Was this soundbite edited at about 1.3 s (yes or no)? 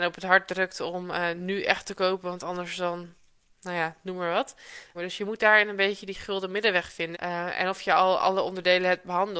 no